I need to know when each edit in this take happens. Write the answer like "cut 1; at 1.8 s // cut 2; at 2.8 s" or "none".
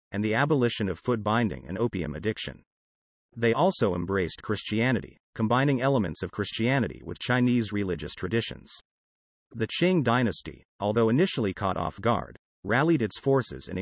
none